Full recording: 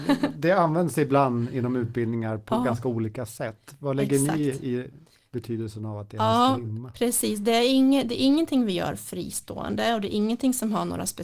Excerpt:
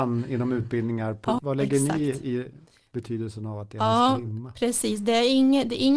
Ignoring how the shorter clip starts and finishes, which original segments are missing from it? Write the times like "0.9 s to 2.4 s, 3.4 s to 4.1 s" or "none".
2.6 s to 3.8 s